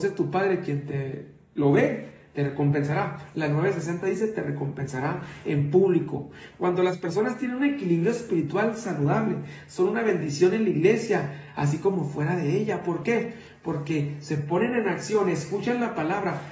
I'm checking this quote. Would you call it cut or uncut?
uncut